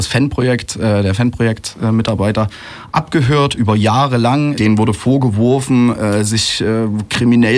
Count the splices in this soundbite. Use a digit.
1